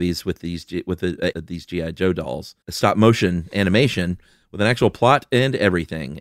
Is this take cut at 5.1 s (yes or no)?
no